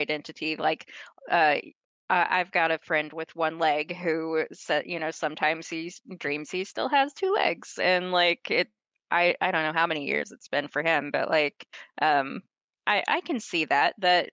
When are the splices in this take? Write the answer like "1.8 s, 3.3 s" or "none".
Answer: none